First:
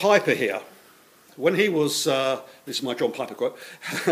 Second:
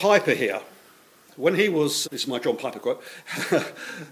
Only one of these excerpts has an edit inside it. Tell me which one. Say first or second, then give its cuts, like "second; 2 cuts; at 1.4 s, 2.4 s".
second; 1 cut; at 2.0 s